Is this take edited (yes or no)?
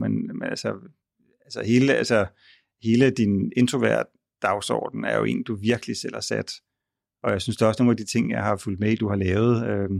no